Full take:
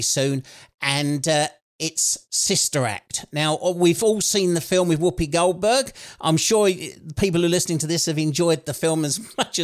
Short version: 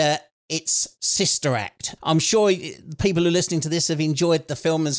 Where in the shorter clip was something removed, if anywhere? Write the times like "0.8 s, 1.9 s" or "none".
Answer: 2.0 s